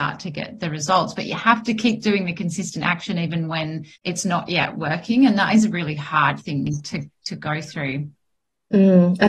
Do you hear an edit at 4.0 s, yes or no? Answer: yes